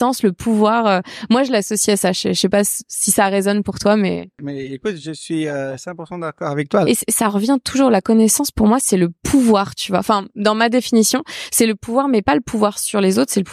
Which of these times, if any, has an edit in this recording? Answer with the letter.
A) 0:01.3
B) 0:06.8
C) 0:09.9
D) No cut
B